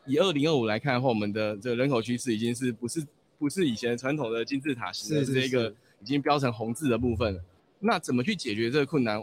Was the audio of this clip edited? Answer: yes; 2 cuts; at 5.3 s, 7.6 s

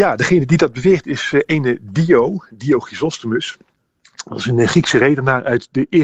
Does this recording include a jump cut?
no; 0 cuts

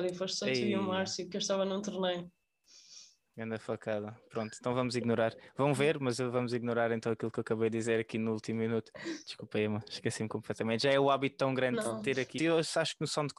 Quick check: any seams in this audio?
yes; 1 cut; at 12.4 s

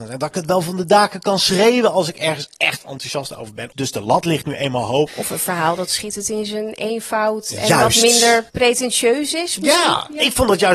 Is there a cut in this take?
yes; 3 cuts; at 3.7 s, 5.1 s, 8.5 s

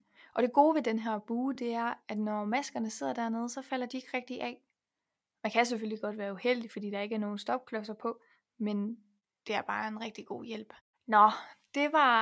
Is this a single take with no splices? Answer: yes; 0 cuts

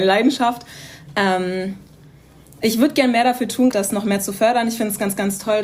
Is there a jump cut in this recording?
yes; 1 cut; at 3.7 s

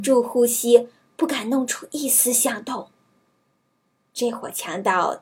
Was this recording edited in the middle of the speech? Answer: no; 0 cuts

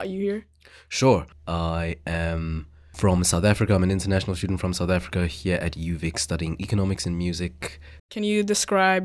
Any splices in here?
yes; 2 cuts; at 1.3 s, 8.0 s

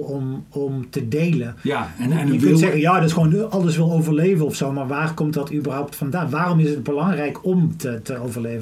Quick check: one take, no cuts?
yes; 0 cuts

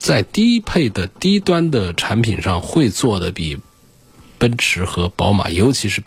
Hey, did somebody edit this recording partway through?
no; 0 cuts

